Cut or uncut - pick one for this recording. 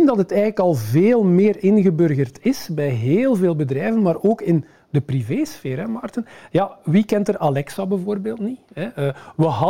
uncut